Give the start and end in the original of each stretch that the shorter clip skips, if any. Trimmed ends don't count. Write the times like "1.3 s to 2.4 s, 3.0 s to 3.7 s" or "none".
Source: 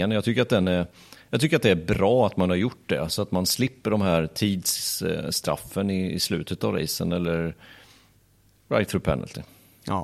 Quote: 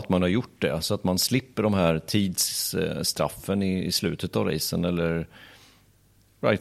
none